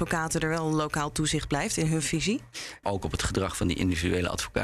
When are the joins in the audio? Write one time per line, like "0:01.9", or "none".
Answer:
0:02.8